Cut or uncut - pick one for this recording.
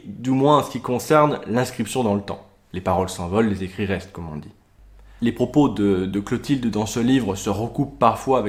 cut